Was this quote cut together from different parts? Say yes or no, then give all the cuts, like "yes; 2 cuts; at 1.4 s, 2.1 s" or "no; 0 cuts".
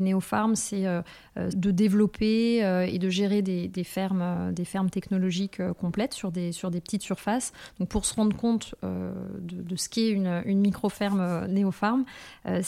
yes; 1 cut; at 1.5 s